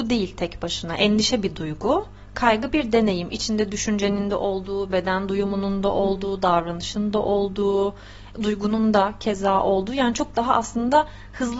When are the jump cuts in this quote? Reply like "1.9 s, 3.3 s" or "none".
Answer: 8.3 s

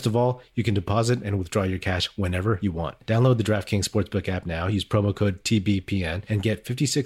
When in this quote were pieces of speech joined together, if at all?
none

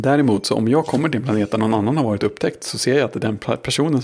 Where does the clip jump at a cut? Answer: none

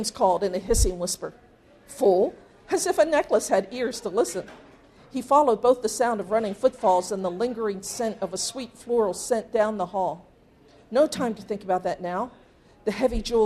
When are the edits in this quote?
5.0 s

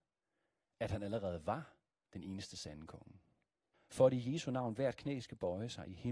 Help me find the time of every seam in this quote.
3.7 s

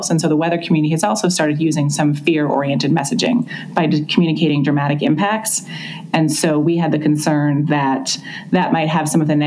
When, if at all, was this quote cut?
none

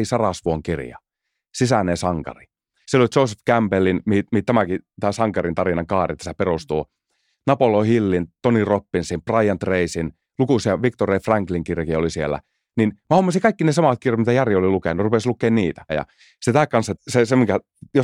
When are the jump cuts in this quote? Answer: 2.8 s, 15.9 s, 16.9 s

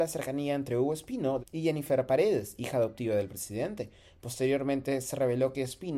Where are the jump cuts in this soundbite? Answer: 1.4 s

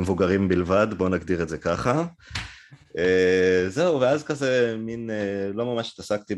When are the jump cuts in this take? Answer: none

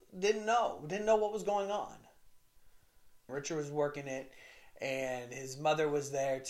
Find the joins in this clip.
3.3 s

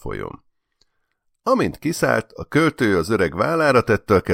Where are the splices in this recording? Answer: none

